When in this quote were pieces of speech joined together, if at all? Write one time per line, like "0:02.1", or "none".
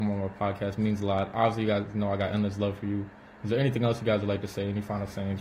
none